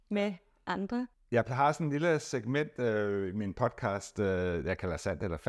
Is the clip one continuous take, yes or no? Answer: yes